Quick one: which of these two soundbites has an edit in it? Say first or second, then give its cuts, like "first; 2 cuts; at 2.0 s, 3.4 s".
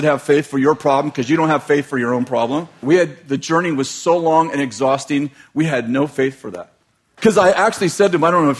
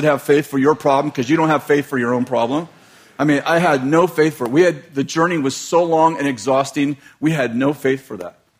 first; 2 cuts; at 2.8 s, 7.2 s